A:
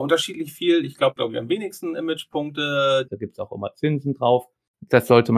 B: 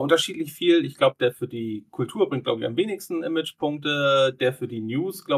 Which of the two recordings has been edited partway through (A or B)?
A